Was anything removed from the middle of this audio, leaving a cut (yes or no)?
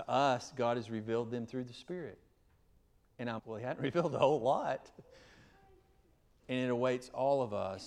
yes